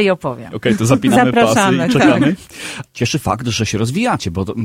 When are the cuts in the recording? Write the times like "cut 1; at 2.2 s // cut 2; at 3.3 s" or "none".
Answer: cut 1; at 2.9 s